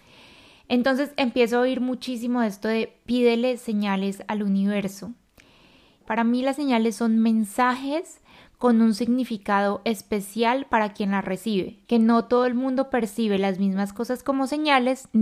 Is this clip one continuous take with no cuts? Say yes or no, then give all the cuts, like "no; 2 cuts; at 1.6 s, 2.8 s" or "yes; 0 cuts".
no; 2 cuts; at 6.0 s, 11.9 s